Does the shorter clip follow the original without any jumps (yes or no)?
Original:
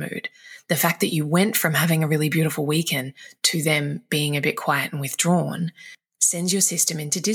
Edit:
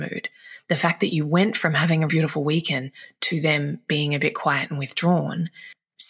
no